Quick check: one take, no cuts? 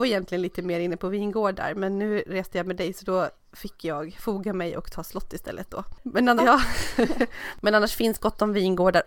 no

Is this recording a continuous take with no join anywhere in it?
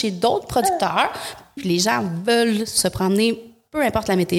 no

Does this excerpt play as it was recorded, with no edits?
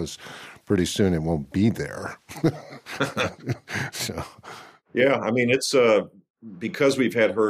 yes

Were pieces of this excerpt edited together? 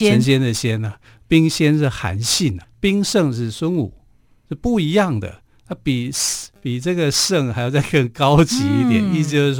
yes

